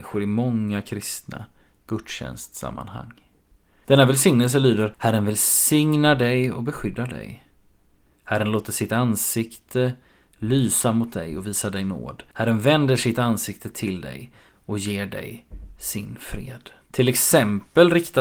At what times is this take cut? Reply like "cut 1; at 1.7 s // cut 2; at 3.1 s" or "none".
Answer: cut 1; at 16.8 s